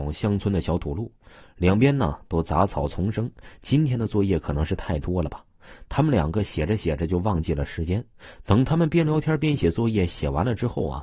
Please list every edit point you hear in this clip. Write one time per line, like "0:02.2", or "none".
none